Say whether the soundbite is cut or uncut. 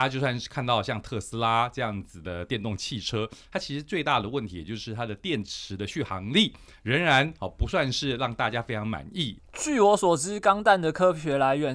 cut